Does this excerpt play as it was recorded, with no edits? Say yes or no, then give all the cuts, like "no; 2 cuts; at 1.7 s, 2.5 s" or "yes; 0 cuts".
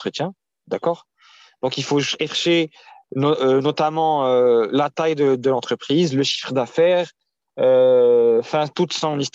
yes; 0 cuts